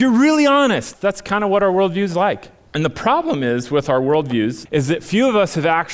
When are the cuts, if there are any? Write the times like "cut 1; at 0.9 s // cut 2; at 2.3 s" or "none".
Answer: cut 1; at 0.9 s // cut 2; at 2.7 s // cut 3; at 4.7 s